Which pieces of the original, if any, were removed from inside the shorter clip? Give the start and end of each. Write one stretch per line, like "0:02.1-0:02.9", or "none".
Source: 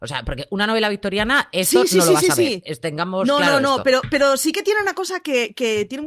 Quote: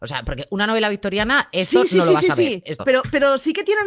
0:02.8-0:03.8